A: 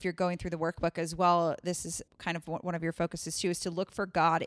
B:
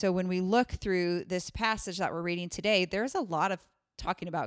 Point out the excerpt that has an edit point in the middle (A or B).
A